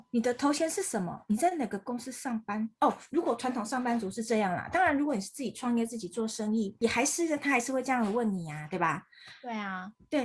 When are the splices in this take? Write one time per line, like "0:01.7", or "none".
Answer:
none